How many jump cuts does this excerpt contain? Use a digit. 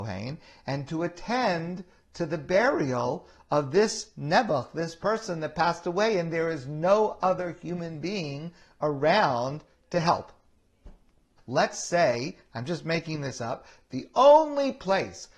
1